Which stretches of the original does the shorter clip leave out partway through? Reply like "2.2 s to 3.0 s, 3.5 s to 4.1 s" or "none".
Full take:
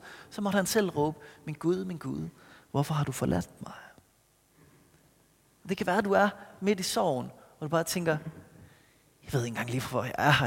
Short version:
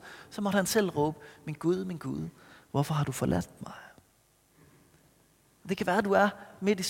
none

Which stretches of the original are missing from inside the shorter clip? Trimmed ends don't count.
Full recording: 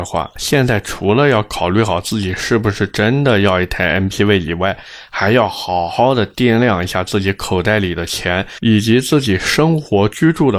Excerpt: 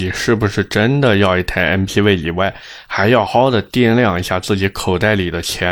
5.5 s to 5.9 s

